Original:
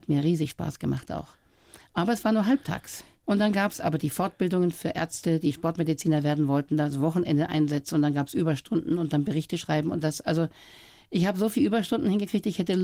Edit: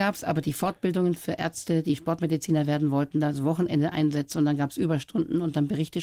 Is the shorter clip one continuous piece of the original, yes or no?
yes